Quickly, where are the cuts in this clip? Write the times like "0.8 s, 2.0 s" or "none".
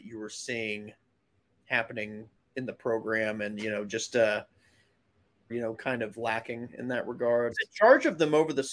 5.5 s, 7.5 s